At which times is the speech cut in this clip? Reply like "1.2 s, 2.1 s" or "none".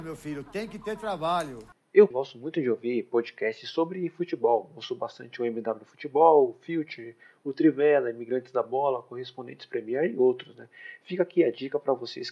2.1 s